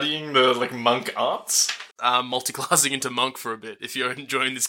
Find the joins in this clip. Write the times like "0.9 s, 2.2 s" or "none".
1.9 s